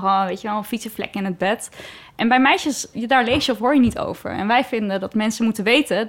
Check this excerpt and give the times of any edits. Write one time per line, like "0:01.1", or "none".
0:02.9